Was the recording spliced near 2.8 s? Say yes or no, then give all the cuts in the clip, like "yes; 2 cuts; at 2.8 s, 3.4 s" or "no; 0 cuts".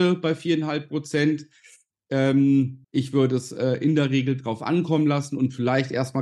yes; 1 cut; at 2.8 s